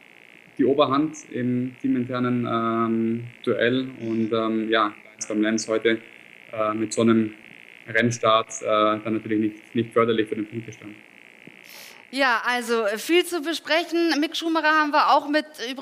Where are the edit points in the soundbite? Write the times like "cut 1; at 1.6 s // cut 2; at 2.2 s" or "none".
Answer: none